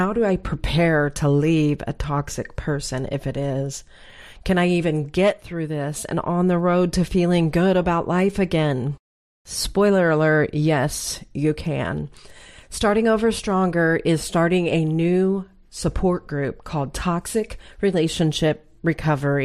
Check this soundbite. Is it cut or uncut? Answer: uncut